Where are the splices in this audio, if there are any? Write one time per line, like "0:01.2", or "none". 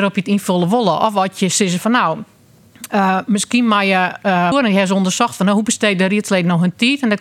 0:04.5